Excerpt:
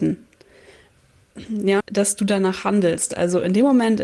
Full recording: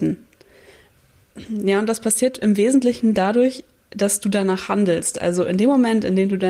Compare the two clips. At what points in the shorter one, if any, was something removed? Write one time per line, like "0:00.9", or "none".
0:01.8